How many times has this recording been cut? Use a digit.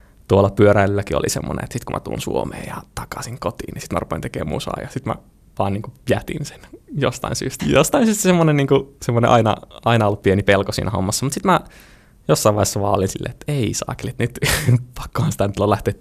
1